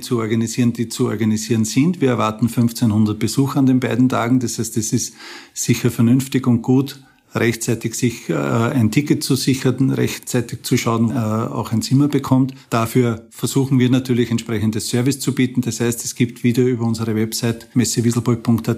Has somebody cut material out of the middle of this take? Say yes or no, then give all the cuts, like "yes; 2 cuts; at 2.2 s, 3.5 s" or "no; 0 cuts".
yes; 1 cut; at 11.1 s